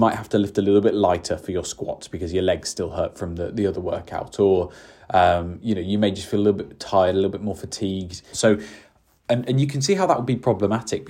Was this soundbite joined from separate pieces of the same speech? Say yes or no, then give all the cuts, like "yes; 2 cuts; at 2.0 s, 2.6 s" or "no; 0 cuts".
yes; 1 cut; at 8.3 s